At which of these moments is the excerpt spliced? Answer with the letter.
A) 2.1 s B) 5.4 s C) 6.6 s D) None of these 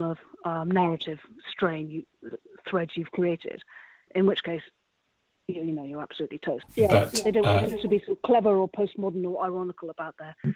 C